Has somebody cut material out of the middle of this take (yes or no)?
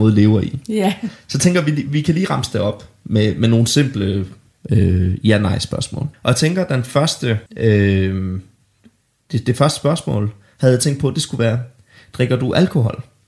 yes